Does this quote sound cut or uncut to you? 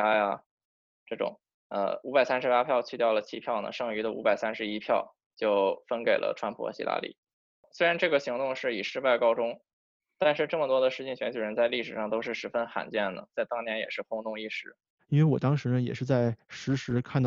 cut